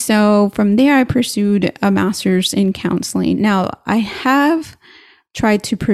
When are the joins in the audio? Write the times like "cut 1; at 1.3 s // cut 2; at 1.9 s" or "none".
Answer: cut 1; at 3.3 s